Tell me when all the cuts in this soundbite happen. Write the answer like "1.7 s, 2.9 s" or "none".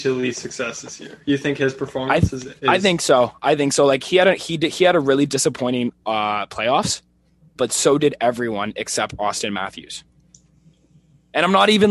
7.6 s